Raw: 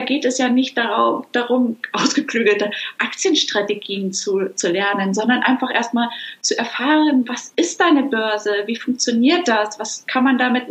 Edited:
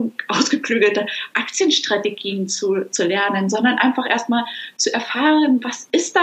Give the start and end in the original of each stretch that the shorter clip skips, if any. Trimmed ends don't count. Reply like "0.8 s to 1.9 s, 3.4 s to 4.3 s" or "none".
none